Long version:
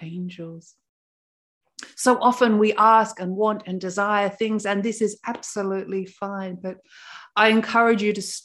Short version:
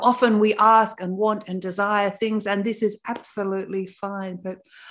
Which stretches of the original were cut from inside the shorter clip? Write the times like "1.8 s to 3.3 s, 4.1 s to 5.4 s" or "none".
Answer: none